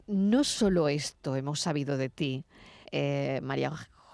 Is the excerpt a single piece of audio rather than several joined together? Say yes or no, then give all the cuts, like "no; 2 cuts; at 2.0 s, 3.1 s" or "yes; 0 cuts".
no; 1 cut; at 2.8 s